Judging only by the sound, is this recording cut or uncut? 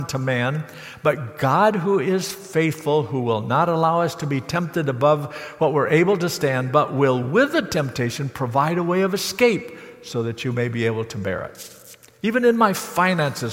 uncut